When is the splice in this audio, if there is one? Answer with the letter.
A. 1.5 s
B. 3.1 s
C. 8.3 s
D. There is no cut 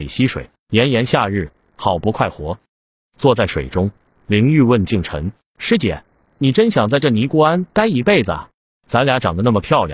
D